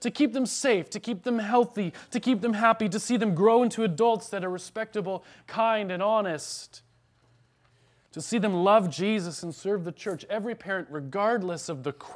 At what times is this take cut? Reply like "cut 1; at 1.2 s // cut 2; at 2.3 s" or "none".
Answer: none